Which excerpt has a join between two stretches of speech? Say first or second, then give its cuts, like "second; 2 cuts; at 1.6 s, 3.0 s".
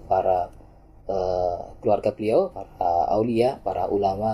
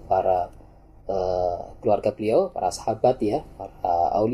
first; 1 cut; at 2.5 s